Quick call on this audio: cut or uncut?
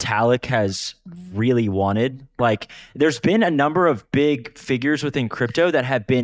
uncut